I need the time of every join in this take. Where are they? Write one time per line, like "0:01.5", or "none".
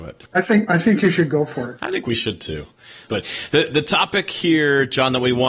0:03.1

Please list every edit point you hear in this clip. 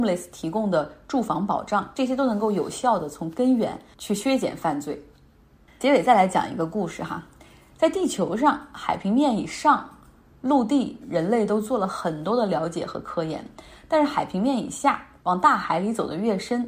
0:11.0

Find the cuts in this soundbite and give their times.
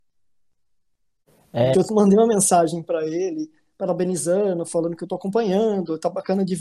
0:01.7

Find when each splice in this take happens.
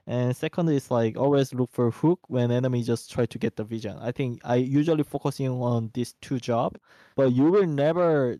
0:07.1

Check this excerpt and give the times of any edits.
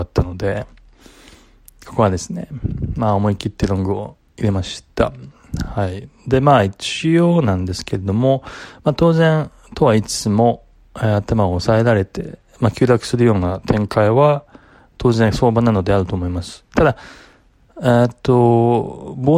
none

